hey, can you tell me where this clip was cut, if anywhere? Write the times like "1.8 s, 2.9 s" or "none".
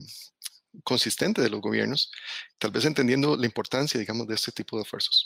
2.5 s